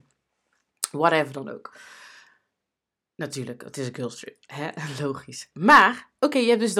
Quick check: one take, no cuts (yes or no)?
yes